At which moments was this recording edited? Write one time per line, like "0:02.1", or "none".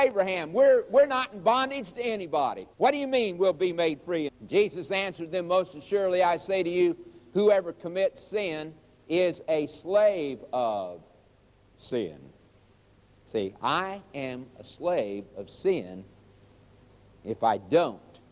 0:02.7
0:04.3